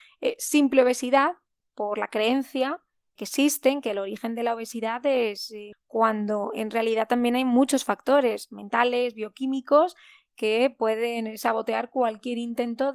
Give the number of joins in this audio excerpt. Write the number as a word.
two